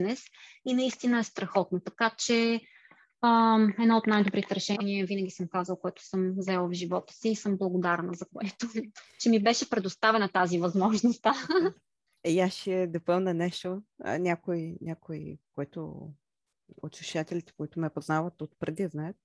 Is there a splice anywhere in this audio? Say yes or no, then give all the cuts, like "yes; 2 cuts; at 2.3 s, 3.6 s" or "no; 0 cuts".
no; 0 cuts